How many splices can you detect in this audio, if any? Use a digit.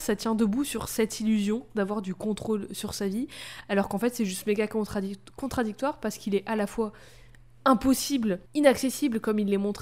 1